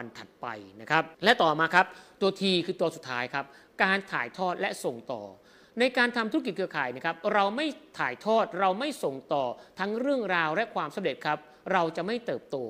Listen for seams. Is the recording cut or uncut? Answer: cut